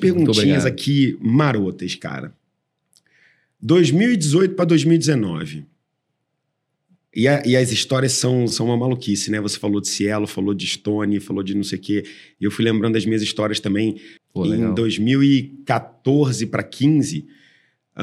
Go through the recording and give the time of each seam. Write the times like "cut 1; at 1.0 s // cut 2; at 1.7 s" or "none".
cut 1; at 8.5 s // cut 2; at 14.2 s